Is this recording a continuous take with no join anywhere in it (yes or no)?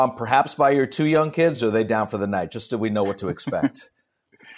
yes